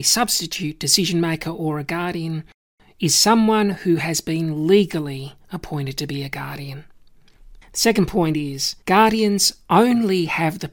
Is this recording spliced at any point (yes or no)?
yes